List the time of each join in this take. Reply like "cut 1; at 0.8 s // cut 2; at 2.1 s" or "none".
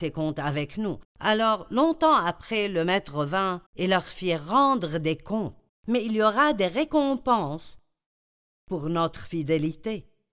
cut 1; at 1.0 s // cut 2; at 3.7 s // cut 3; at 5.7 s